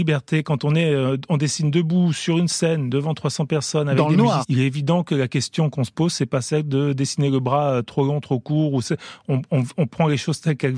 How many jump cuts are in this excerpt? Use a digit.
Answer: 1